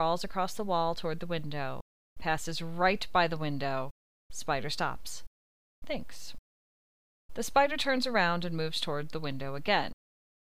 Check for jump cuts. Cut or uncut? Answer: uncut